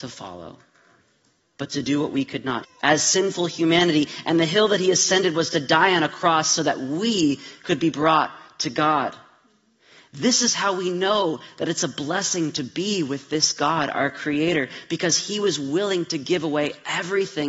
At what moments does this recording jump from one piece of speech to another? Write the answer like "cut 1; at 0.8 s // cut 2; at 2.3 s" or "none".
cut 1; at 2.6 s